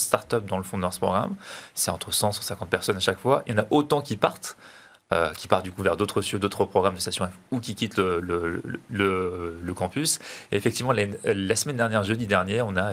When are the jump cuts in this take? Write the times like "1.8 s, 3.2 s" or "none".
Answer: none